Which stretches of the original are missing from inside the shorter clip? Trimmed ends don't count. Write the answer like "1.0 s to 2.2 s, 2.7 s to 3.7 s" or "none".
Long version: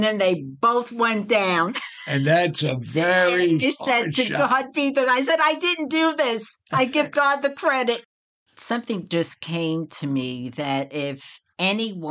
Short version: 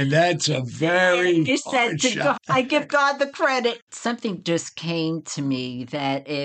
4.5 s to 6.6 s, 8.1 s to 8.5 s